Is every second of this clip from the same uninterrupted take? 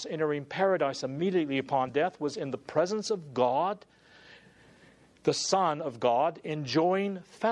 yes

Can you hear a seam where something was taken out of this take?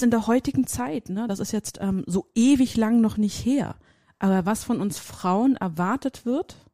no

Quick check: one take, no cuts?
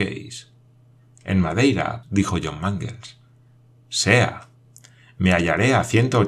no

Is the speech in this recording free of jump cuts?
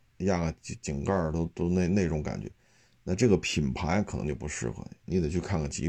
yes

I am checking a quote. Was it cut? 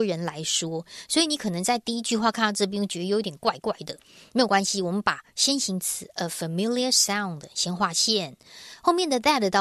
no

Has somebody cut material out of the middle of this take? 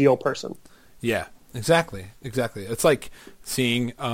no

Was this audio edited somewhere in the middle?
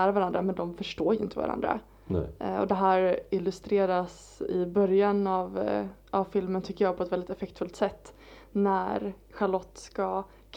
no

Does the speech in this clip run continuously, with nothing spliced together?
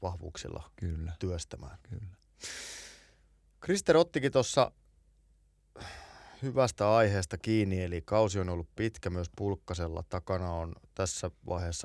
yes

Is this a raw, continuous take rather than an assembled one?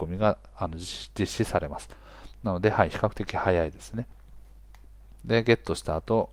no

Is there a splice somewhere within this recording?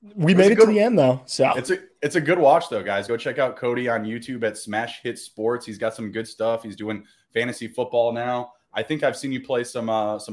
no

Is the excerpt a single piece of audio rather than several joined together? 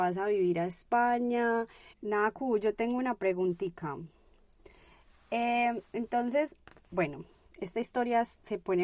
no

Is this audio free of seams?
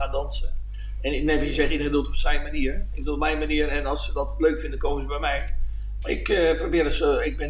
no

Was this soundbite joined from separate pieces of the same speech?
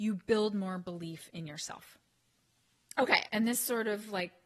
yes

